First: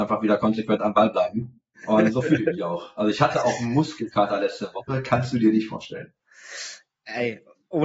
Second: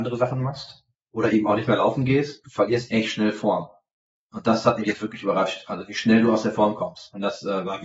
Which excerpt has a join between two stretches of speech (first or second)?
first